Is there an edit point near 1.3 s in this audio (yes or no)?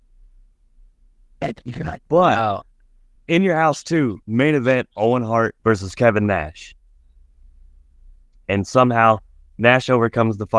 no